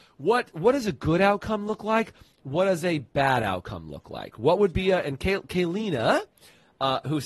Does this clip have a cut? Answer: no; 0 cuts

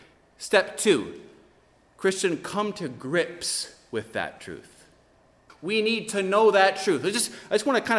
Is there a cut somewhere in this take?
yes; 1 cut; at 5.5 s

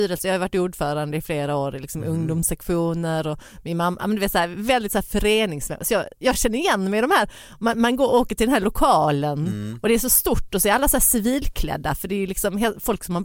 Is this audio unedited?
yes; 0 cuts

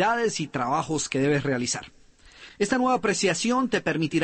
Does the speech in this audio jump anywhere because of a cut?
yes; 1 cut; at 2.5 s

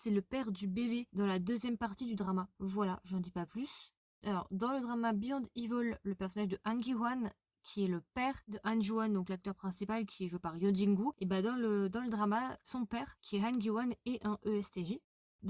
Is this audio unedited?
yes; 0 cuts

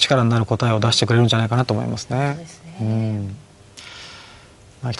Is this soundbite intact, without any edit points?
yes; 0 cuts

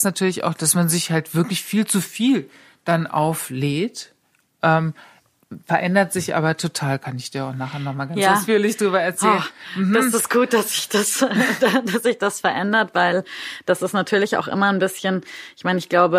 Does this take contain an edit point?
no; 0 cuts

